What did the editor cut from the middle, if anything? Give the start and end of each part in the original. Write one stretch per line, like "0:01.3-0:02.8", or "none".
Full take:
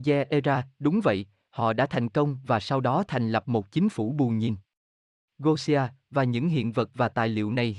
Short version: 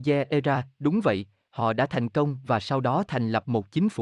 none